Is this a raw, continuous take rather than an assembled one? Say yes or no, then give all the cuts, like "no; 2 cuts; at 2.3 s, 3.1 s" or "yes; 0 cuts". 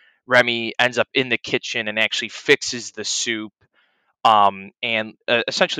yes; 0 cuts